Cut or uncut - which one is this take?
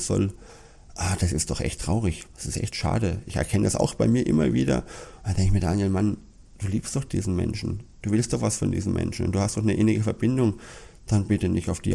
uncut